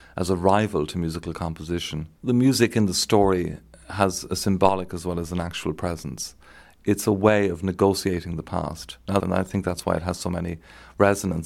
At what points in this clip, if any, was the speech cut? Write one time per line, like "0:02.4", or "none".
0:02.2
0:09.2

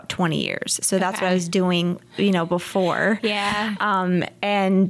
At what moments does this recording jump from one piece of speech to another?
none

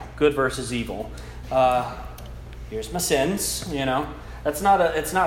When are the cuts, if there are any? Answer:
0:01.4

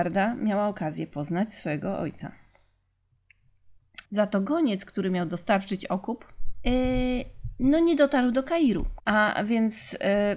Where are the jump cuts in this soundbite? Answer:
0:04.1
0:06.6
0:09.0

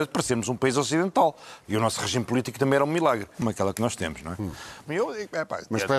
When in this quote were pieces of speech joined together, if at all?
0:01.6
0:03.3
0:04.9

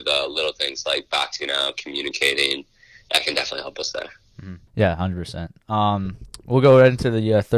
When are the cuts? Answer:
0:04.7

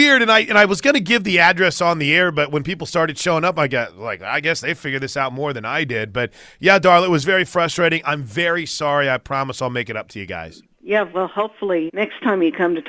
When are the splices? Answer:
0:10.7
0:11.9

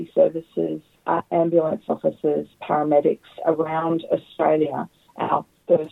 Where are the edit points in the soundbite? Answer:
0:00.9

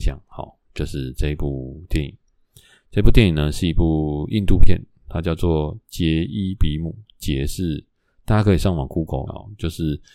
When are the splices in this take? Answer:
0:09.3

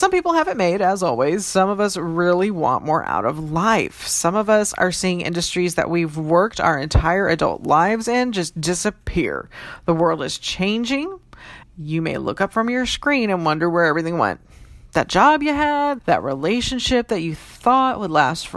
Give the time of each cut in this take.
0:11.6
0:16.0

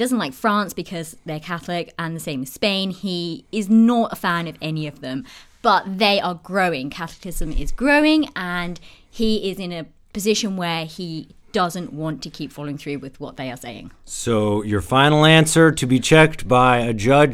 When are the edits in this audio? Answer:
none

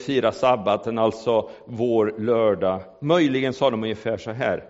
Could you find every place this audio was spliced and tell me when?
none

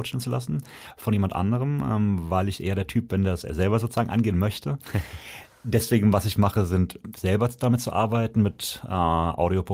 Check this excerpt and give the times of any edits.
none

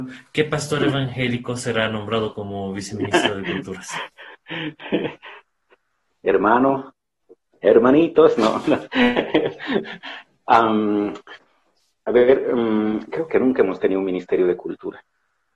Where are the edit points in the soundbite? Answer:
none

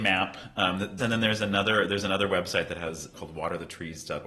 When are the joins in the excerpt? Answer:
0:01.0
0:03.1

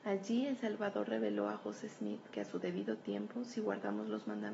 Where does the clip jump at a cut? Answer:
none

